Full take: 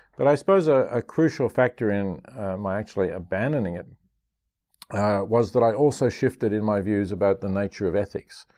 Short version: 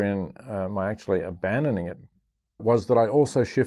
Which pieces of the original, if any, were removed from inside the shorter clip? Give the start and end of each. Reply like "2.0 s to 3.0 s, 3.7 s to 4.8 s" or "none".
4.5 s to 5.3 s